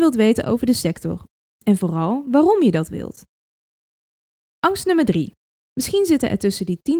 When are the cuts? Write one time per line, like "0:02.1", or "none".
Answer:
0:05.5